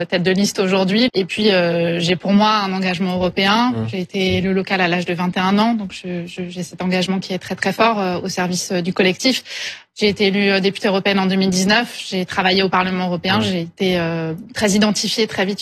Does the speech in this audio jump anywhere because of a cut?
yes; 1 cut; at 1.1 s

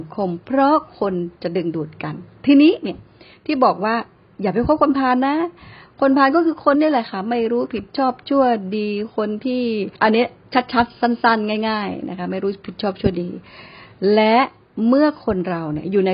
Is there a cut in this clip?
yes; 2 cuts; at 6.7 s, 9.9 s

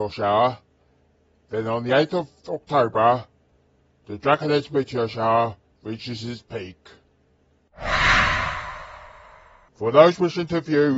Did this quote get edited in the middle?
no; 0 cuts

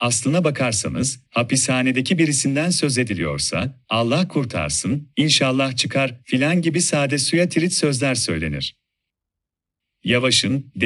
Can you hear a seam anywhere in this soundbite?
yes; 1 cut; at 1.3 s

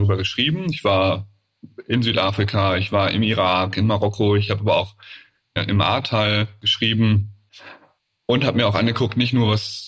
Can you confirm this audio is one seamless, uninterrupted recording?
no; 1 cut; at 5.6 s

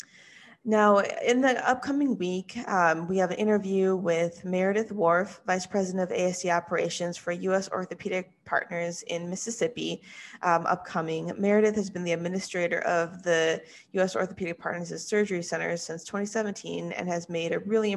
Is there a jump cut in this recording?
no; 0 cuts

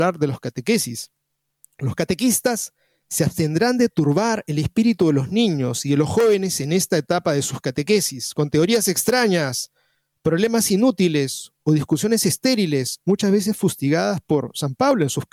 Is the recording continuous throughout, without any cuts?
yes; 0 cuts

